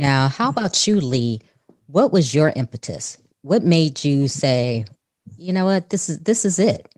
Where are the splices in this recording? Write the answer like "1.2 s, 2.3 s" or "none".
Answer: none